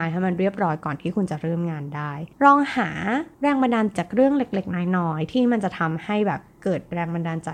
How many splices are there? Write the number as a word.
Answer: one